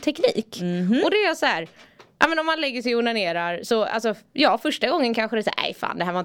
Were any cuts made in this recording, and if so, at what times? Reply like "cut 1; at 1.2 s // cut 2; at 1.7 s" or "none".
none